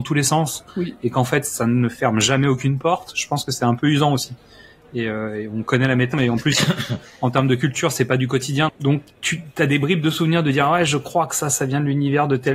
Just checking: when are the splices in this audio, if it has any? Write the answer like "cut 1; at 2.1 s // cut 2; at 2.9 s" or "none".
cut 1; at 6.1 s // cut 2; at 8.7 s

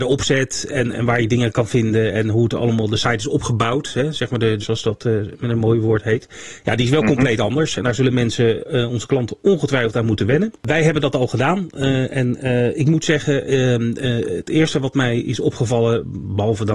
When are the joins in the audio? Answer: cut 1; at 4.6 s

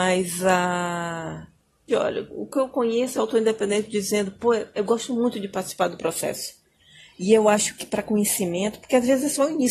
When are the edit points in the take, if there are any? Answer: cut 1; at 1.9 s // cut 2; at 3.1 s

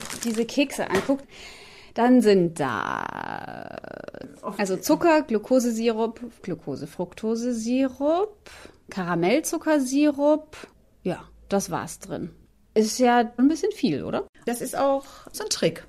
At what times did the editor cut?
cut 1; at 13.4 s

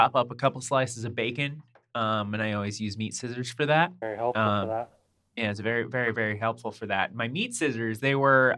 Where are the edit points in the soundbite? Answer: none

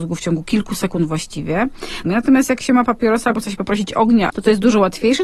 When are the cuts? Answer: cut 1; at 2.0 s // cut 2; at 4.3 s

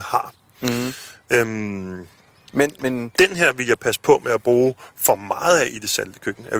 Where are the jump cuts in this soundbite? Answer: none

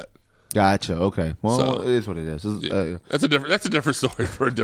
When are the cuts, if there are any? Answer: none

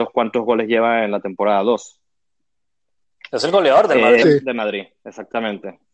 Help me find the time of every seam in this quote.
cut 1; at 4.2 s

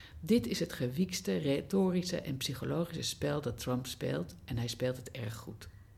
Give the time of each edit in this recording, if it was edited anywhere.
none

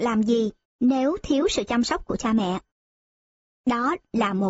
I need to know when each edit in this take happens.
none

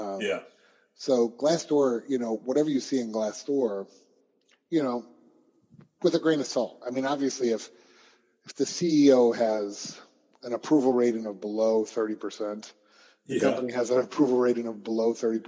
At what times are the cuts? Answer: none

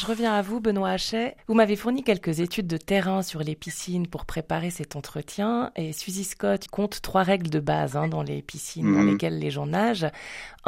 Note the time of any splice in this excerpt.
cut 1; at 6.7 s

